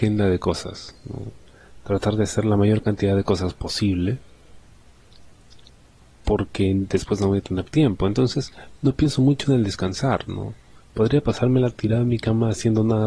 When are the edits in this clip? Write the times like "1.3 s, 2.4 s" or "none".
none